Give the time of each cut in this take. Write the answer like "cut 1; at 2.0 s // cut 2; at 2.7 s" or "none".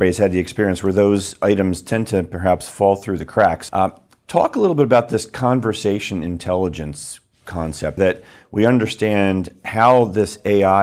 cut 1; at 3.7 s // cut 2; at 8.0 s